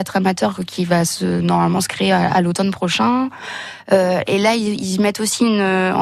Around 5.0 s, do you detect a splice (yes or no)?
no